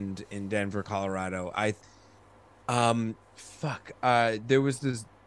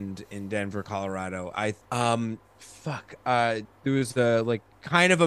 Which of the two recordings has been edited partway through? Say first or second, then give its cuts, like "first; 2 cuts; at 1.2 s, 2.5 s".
second; 2 cuts; at 1.8 s, 3.6 s